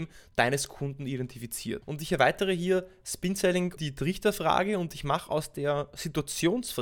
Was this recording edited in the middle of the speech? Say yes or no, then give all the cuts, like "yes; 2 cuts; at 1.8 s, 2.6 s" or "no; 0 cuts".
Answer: yes; 2 cuts; at 1.8 s, 3.8 s